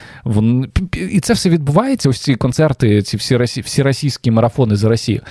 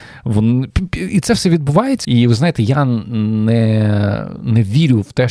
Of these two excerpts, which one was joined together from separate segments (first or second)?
second